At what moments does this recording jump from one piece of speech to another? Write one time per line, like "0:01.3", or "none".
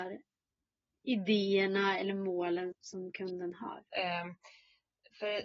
0:02.7
0:03.9